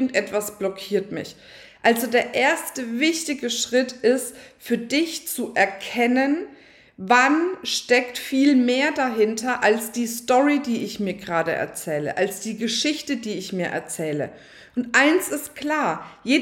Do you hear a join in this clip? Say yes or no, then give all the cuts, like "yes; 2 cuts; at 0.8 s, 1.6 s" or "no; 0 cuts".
no; 0 cuts